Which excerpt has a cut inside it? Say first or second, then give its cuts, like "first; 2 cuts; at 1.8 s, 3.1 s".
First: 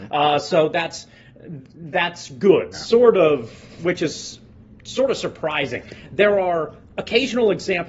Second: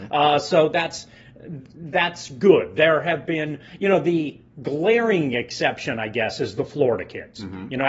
first; 1 cut; at 2.7 s